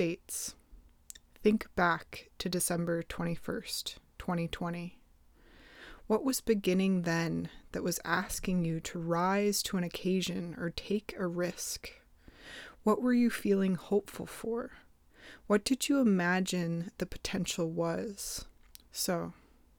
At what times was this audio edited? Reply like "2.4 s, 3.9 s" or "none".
18.9 s